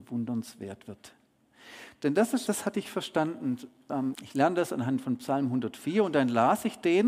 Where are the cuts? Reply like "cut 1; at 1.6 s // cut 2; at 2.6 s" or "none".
cut 1; at 2.5 s // cut 2; at 4.1 s

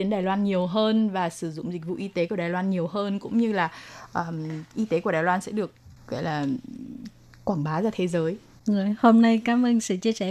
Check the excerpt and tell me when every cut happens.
none

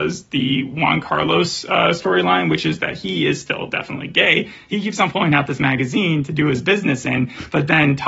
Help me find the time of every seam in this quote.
none

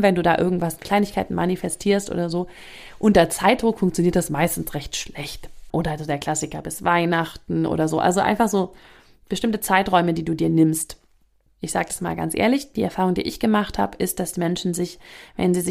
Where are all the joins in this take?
cut 1; at 5.7 s // cut 2; at 11.5 s

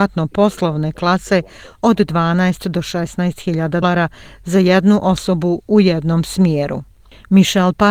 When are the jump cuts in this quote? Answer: cut 1; at 3.8 s

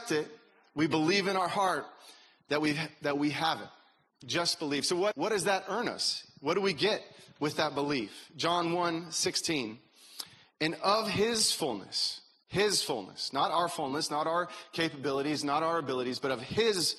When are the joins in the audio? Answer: cut 1; at 5.1 s

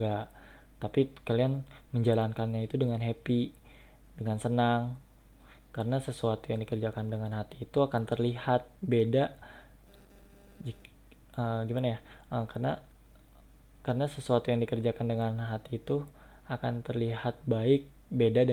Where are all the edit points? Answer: none

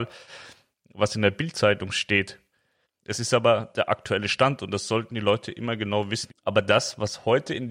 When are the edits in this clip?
cut 1; at 2.8 s // cut 2; at 6.3 s

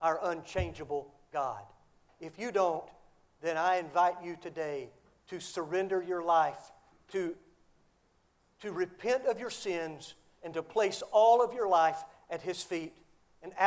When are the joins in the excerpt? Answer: cut 1; at 2.1 s // cut 2; at 6.9 s

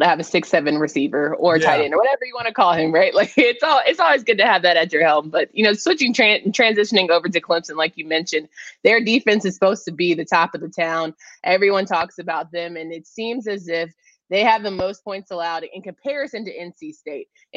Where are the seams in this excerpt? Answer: none

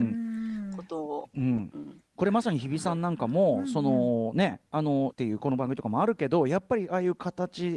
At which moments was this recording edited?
cut 1; at 5.1 s

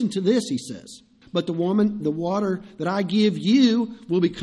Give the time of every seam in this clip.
cut 1; at 1.2 s

